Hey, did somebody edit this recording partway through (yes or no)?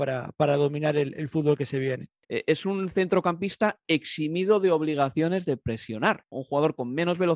yes